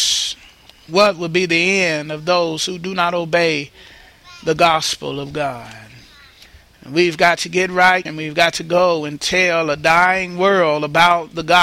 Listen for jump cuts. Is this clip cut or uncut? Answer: cut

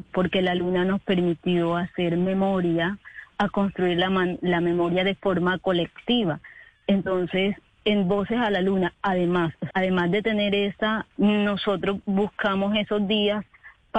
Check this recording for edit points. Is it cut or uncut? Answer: cut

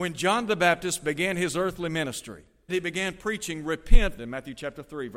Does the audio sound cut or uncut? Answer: cut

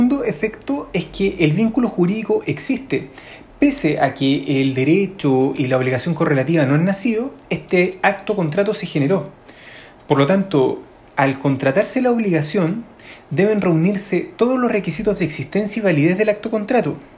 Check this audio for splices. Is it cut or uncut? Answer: uncut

